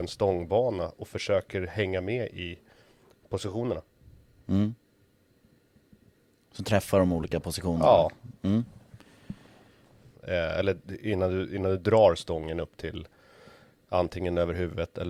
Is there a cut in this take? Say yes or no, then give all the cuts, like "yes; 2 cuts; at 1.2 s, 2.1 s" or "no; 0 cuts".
yes; 1 cut; at 10.1 s